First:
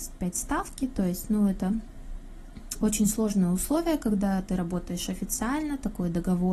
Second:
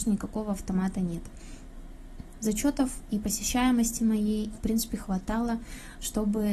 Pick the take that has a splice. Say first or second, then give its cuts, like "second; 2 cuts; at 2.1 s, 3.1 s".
second; 2 cuts; at 2.3 s, 4.5 s